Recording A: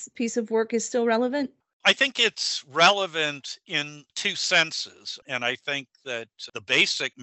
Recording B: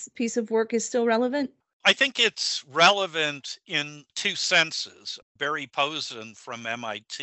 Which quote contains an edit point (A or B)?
A